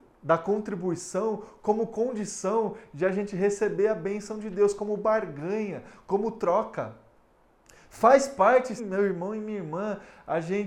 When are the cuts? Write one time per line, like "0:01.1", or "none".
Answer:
0:08.8